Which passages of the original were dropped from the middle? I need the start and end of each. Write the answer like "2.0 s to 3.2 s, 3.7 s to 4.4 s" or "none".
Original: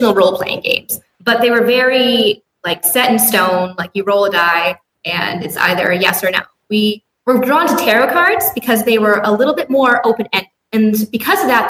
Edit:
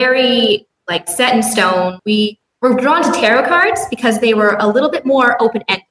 3.8 s to 6.6 s